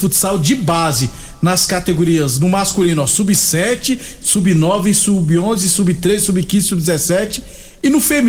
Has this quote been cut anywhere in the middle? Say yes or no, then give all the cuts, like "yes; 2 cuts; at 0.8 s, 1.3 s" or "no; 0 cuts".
no; 0 cuts